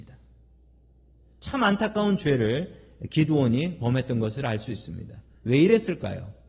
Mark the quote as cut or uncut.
uncut